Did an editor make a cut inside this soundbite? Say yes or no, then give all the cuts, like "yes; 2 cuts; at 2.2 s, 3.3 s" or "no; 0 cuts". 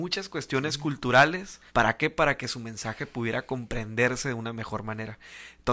yes; 1 cut; at 1.7 s